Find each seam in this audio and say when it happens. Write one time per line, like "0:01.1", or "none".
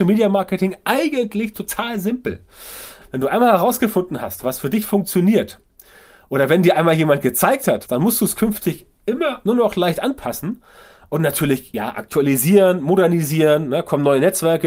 0:03.0
0:07.9